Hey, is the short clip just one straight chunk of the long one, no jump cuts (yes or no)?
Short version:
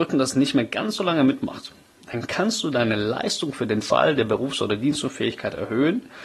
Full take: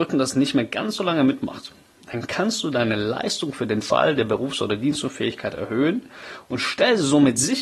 yes